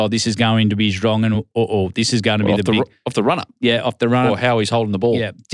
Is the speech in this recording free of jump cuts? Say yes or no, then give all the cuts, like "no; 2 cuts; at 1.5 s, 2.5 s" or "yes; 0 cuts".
yes; 0 cuts